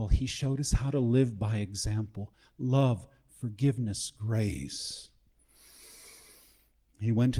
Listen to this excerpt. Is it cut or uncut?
uncut